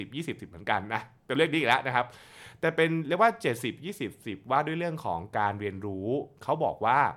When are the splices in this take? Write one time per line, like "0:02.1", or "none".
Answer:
none